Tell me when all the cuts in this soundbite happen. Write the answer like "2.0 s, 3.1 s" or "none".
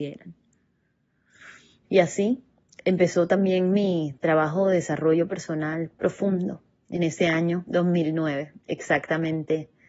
1.8 s